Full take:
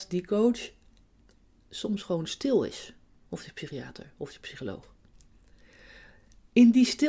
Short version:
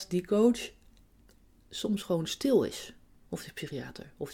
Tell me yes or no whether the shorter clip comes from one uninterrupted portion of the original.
yes